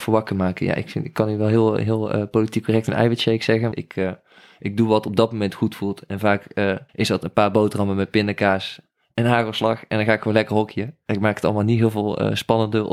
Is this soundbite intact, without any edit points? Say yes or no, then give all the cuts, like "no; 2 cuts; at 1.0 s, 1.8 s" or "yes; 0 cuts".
no; 2 cuts; at 3.7 s, 6.9 s